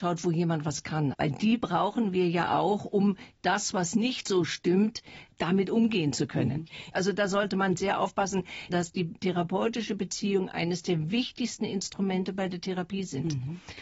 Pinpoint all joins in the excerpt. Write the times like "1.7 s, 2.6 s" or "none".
1.1 s, 6.9 s, 8.7 s